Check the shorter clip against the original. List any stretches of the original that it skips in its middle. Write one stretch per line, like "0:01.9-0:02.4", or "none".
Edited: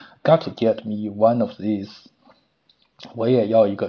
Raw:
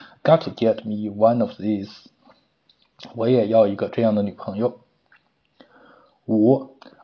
none